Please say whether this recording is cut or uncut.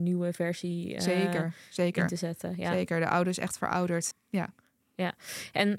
cut